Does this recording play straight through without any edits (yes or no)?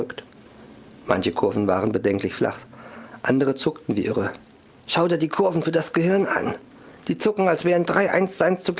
no